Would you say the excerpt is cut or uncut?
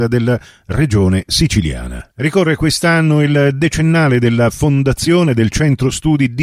cut